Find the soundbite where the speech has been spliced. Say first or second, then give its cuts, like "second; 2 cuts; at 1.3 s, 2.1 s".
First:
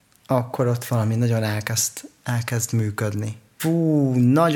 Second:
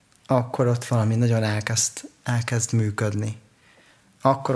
first; 1 cut; at 3.6 s